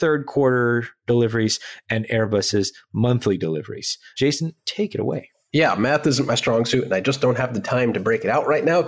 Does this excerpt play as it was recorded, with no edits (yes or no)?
yes